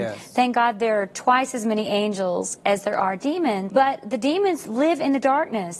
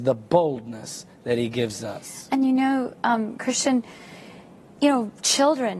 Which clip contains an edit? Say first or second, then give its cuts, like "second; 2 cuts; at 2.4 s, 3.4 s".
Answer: first; 1 cut; at 3.7 s